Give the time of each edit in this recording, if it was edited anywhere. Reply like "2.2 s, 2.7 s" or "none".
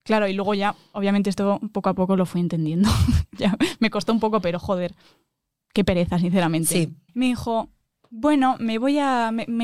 7.1 s